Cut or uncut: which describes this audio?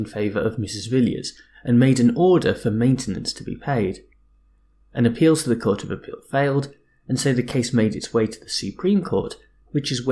uncut